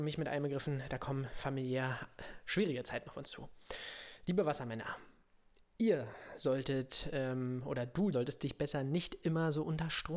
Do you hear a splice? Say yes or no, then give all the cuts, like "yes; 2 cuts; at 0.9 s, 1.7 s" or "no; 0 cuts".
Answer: yes; 1 cut; at 8.1 s